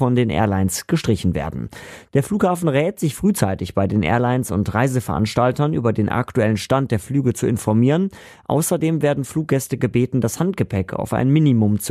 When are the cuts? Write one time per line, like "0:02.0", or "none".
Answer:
none